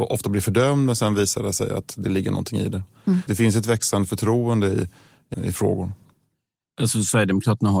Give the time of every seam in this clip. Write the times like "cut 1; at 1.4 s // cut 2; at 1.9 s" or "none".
cut 1; at 3.3 s // cut 2; at 5.3 s